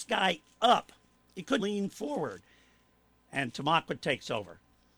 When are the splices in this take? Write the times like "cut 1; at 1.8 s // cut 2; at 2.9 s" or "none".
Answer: cut 1; at 1.6 s

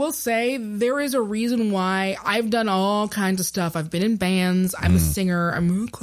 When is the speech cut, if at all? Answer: none

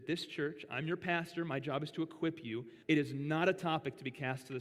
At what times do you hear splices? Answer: cut 1; at 2.8 s

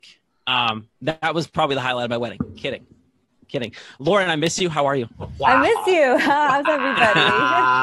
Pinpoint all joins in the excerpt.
cut 1; at 0.9 s

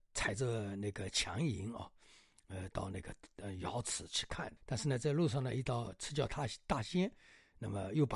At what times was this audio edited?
cut 1; at 4.6 s

